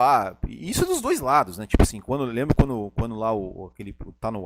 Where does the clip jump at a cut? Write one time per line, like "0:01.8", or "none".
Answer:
none

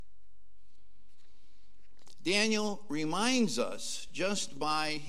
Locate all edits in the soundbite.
none

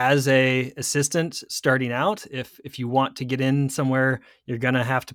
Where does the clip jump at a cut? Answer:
0:01.4

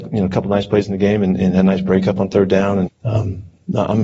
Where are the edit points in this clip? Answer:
0:02.9

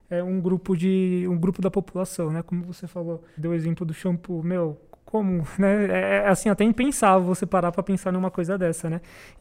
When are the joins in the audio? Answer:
0:03.4

